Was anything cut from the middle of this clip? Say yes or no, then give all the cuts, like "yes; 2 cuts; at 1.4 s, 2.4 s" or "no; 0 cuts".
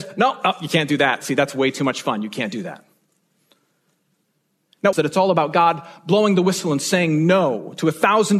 yes; 1 cut; at 4.9 s